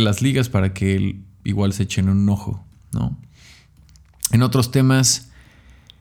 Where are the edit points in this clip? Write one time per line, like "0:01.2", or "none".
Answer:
none